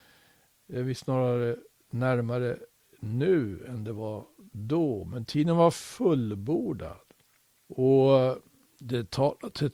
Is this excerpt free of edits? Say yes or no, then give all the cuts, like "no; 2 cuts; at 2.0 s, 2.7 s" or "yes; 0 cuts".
no; 1 cut; at 7.5 s